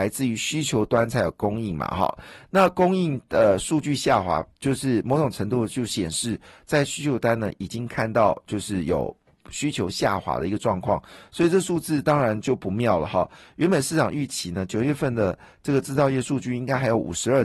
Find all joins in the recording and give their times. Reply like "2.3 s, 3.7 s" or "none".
none